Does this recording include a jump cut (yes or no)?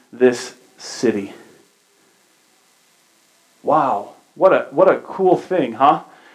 no